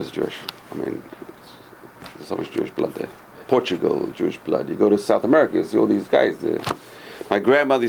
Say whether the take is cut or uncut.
uncut